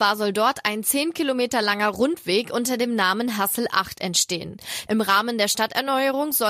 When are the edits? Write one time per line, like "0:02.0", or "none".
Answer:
0:04.9